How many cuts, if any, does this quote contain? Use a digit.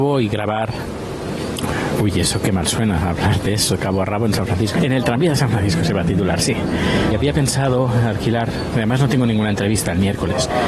2